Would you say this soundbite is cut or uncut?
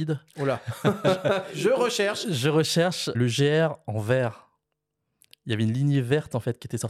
cut